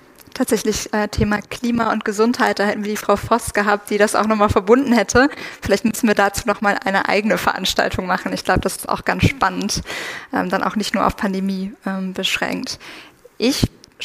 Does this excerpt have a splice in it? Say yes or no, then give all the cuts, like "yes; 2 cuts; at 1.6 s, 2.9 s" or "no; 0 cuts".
no; 0 cuts